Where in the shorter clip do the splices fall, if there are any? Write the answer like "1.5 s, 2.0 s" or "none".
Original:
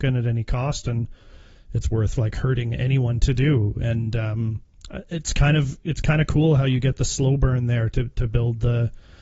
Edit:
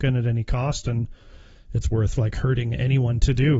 none